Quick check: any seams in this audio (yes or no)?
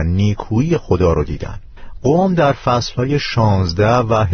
no